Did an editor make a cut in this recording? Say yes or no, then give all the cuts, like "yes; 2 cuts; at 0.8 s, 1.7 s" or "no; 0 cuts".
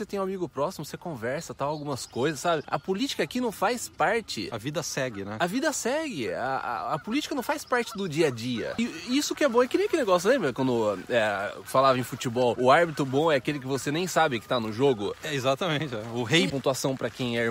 yes; 1 cut; at 16.5 s